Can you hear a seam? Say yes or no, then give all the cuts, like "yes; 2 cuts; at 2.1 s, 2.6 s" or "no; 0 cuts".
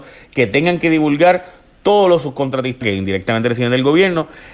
yes; 1 cut; at 2.8 s